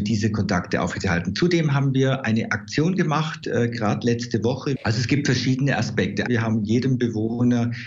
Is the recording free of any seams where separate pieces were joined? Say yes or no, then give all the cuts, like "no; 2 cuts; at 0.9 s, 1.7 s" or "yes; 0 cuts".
no; 2 cuts; at 4.8 s, 6.3 s